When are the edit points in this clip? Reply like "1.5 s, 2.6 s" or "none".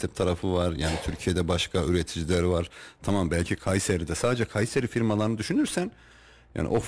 none